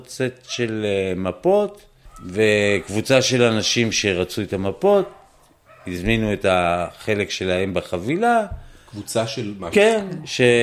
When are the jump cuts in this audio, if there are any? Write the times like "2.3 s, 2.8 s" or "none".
9.7 s